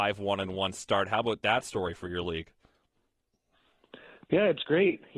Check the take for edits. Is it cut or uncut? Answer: uncut